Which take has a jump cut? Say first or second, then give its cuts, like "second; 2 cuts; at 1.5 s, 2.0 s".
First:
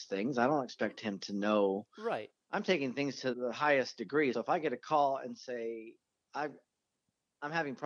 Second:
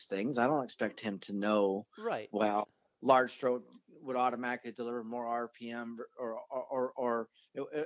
first; 3 cuts; at 2.3 s, 3.3 s, 4.3 s